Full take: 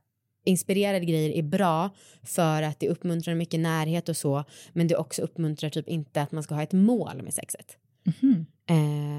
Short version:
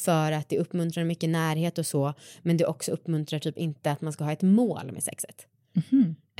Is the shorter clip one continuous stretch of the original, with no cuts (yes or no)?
yes